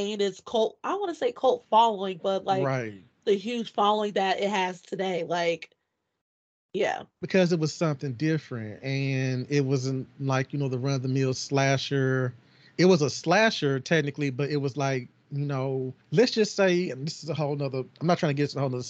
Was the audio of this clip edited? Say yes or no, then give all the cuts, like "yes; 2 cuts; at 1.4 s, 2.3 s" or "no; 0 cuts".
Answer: yes; 3 cuts; at 7.1 s, 16.0 s, 17.9 s